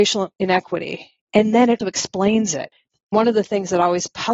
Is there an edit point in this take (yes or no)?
yes